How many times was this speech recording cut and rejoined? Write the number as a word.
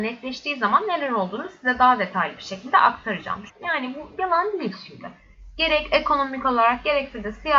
one